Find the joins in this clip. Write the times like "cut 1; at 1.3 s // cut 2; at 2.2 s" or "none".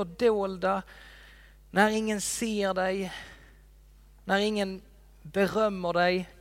none